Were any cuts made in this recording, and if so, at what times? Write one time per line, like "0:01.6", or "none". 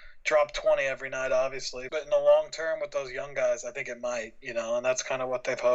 0:01.9